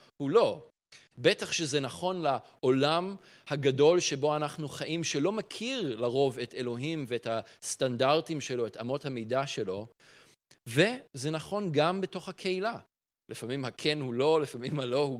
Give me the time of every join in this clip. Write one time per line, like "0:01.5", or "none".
0:01.1
0:13.2